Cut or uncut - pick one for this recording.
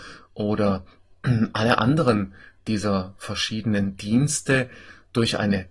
uncut